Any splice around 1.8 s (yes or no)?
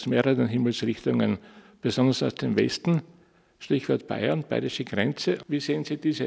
no